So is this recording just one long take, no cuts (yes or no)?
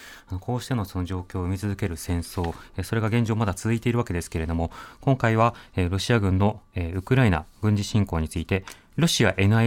yes